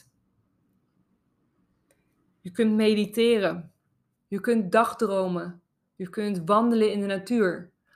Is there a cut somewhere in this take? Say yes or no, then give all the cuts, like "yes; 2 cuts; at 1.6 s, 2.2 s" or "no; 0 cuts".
yes; 1 cut; at 4.2 s